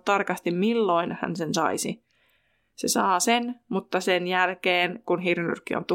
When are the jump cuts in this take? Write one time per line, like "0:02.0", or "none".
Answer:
none